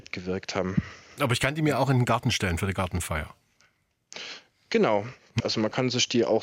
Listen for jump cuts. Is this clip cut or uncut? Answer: cut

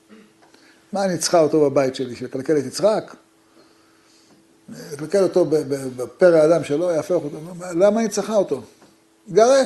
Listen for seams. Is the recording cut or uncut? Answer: uncut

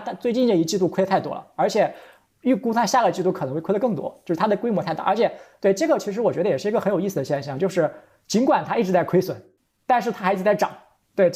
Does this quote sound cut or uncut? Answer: uncut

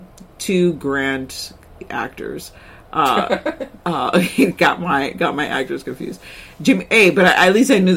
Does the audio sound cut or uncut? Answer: uncut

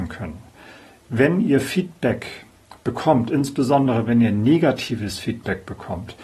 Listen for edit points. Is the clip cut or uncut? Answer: uncut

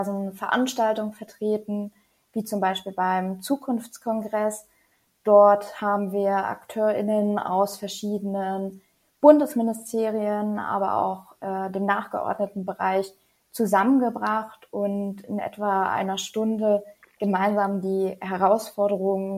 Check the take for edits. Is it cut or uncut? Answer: uncut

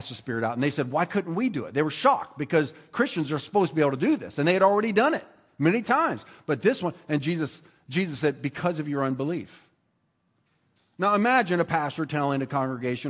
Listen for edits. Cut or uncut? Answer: uncut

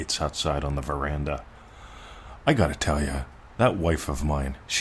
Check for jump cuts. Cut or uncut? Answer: uncut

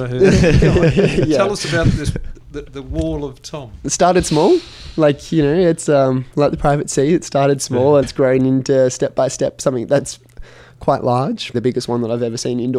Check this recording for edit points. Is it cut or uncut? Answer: cut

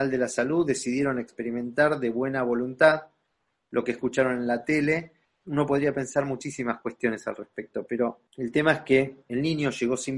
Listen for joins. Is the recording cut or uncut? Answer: cut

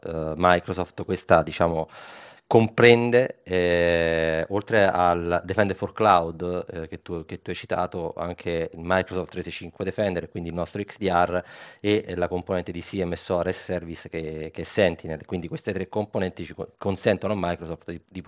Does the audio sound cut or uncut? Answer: uncut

